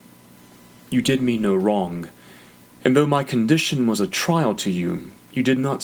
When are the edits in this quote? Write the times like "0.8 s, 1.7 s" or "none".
2.6 s